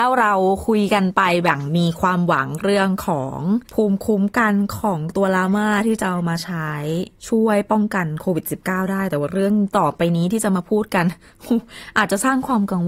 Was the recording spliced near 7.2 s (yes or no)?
yes